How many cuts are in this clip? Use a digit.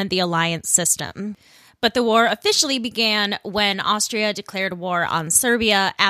0